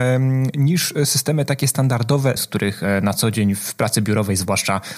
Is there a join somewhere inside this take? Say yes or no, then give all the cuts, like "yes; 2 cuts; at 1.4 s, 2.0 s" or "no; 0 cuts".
yes; 1 cut; at 2.4 s